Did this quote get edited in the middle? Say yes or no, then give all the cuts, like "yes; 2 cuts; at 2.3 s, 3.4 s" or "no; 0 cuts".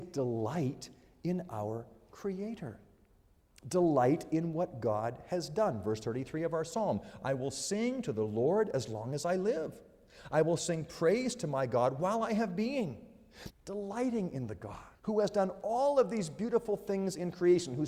yes; 2 cuts; at 13.5 s, 14.9 s